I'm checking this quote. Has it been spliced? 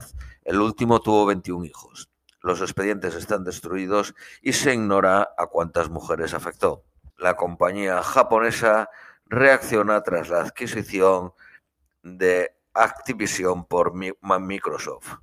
yes; 1 cut; at 7.1 s

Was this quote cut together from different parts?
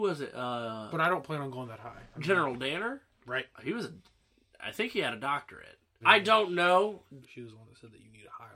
yes; 2 cuts; at 6.0 s, 7.2 s

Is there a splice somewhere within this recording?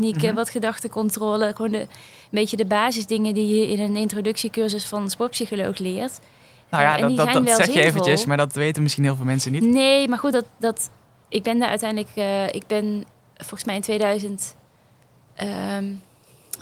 no; 0 cuts

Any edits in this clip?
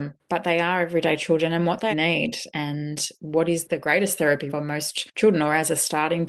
yes; 2 cuts; at 1.9 s, 4.5 s

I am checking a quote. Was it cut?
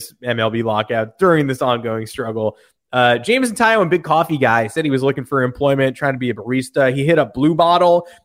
no; 0 cuts

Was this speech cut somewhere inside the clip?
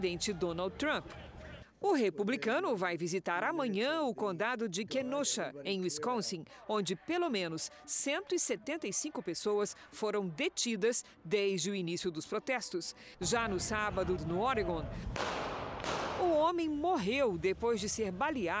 yes; 2 cuts; at 13.1 s, 14.2 s

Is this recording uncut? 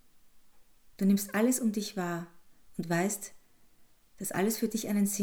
no; 1 cut; at 0.9 s

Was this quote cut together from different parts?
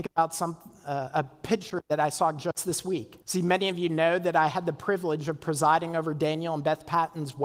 yes; 1 cut; at 3.2 s

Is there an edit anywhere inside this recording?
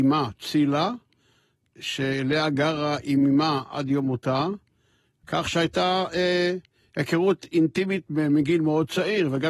no; 0 cuts

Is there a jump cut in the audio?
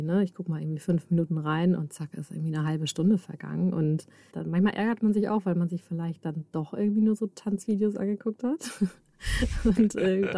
yes; 1 cut; at 4.3 s

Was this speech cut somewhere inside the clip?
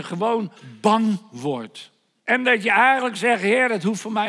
yes; 1 cut; at 2.2 s

